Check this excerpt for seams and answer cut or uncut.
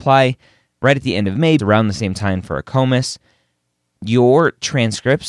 cut